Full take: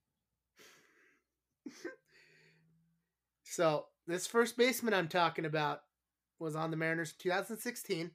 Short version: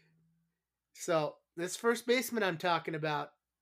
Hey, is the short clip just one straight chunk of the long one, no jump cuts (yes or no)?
yes